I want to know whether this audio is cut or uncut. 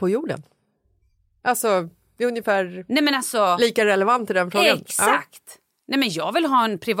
uncut